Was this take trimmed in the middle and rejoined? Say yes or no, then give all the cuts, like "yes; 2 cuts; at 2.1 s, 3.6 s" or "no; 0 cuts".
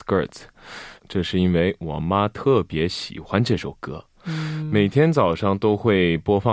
yes; 1 cut; at 1.0 s